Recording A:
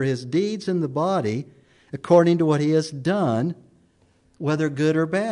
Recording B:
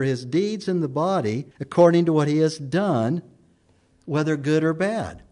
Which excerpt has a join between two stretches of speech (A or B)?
B